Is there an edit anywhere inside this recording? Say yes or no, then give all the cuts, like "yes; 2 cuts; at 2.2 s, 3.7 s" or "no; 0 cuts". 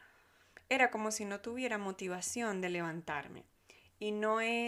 no; 0 cuts